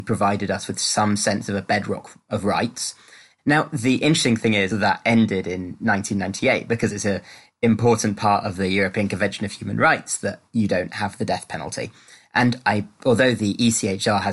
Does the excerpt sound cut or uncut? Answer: cut